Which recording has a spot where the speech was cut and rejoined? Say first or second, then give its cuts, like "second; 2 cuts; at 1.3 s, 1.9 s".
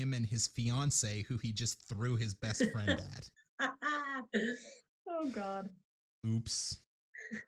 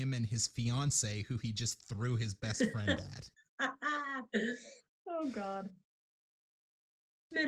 first; 1 cut; at 6.2 s